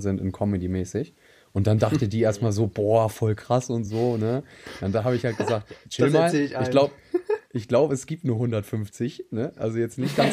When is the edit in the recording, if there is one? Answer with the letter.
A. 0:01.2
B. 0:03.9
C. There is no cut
C